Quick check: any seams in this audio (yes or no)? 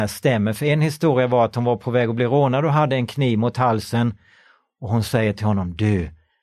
no